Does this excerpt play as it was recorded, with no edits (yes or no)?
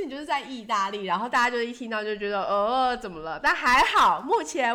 yes